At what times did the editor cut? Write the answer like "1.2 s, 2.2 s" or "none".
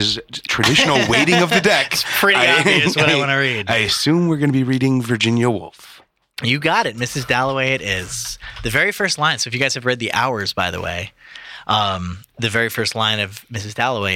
none